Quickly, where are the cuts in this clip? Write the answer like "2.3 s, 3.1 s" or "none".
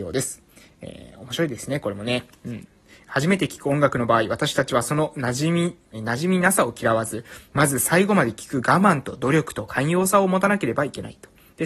5.9 s